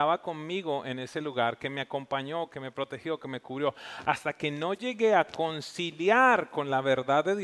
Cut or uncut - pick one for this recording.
uncut